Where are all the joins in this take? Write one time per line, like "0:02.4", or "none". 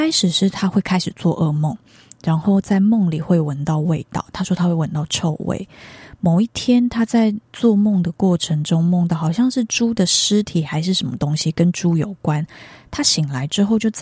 none